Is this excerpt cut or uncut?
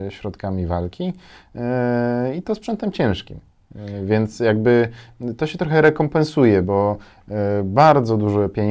uncut